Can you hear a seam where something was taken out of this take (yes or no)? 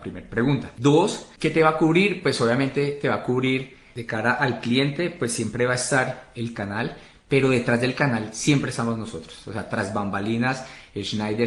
no